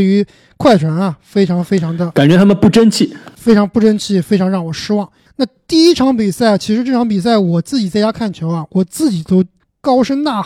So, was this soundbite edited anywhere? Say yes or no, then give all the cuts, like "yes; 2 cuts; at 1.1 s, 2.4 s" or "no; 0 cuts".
no; 0 cuts